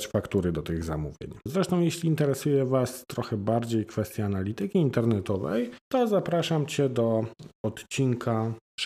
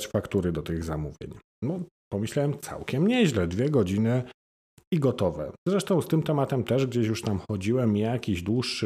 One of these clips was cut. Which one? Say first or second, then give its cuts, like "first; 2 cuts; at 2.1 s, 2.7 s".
first; 2 cuts; at 1.5 s, 5.8 s